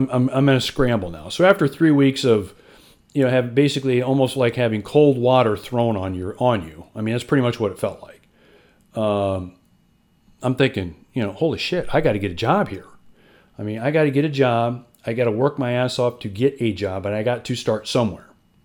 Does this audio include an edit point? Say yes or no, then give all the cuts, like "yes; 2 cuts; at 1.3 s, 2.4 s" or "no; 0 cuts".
no; 0 cuts